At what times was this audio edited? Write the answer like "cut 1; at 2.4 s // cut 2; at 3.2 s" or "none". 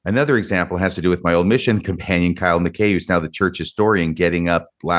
none

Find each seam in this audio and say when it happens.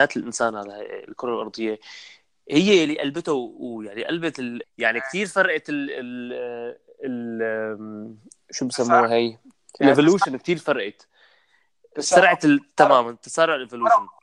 cut 1; at 4.6 s

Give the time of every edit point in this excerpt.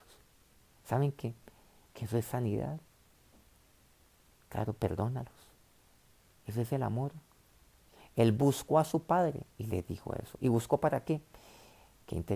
none

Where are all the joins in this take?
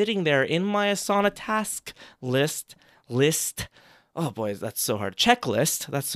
none

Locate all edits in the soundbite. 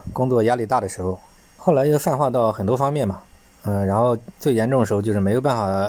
cut 1; at 1.4 s // cut 2; at 4.3 s

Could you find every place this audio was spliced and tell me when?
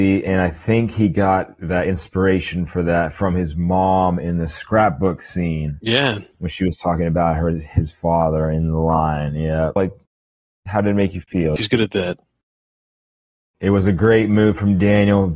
cut 1; at 9.8 s // cut 2; at 11.6 s

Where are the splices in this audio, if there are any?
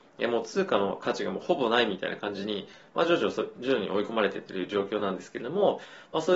none

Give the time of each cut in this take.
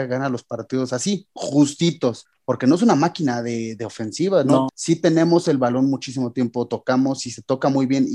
cut 1; at 4.7 s

